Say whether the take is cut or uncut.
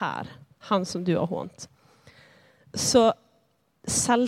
uncut